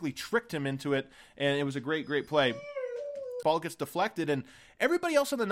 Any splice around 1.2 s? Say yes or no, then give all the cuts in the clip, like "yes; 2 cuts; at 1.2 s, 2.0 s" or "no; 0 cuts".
no; 1 cut; at 3.4 s